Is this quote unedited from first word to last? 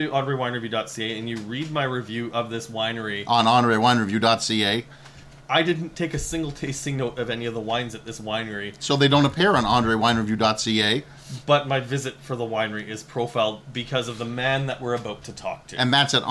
no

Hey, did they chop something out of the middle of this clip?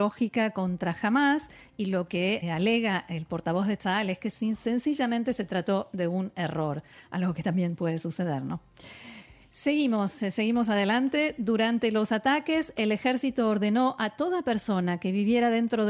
yes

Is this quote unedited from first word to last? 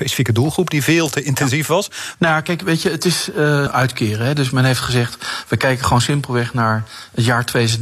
no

